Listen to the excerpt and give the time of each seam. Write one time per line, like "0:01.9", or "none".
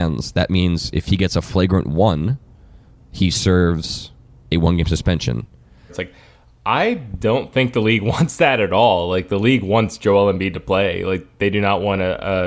0:05.9